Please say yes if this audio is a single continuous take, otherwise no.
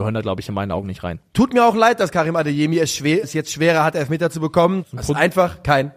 no